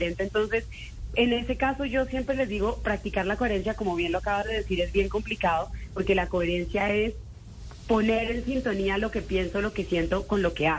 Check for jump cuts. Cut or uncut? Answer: uncut